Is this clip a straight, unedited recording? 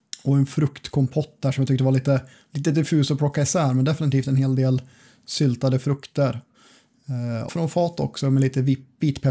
no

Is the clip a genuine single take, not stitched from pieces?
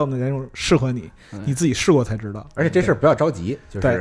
yes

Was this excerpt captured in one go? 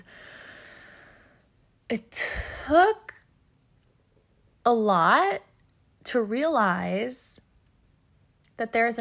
yes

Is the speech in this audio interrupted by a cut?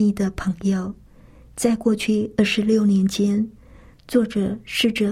no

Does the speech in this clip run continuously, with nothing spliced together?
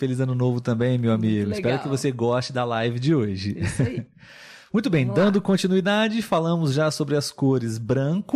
yes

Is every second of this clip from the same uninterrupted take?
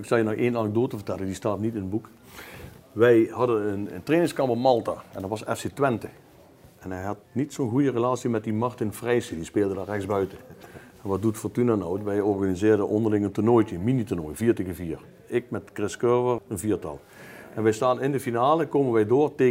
no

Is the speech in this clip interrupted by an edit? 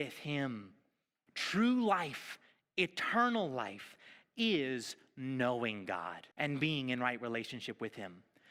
yes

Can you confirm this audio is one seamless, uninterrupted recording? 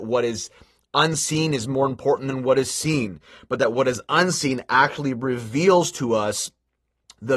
yes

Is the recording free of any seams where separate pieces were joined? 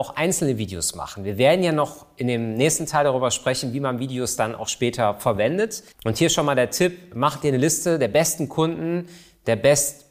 no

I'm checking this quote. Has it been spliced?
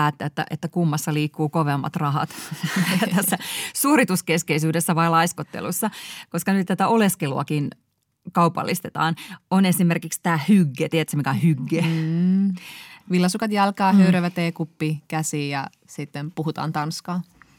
no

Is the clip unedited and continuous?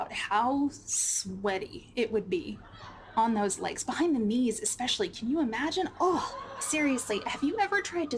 yes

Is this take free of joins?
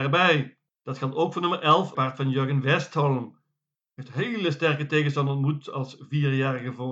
no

